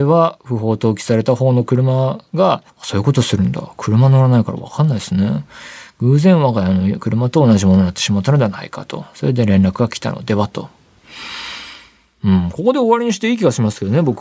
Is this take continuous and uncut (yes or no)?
no